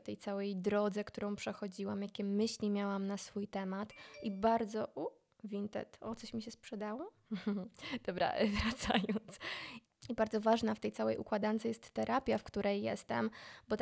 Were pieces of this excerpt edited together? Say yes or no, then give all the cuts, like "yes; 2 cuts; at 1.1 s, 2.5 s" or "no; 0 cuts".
no; 0 cuts